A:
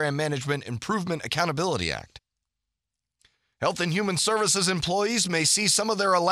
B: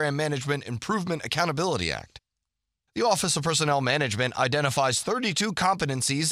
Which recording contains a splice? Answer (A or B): B